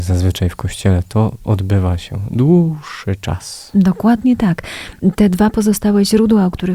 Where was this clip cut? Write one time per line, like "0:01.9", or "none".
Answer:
none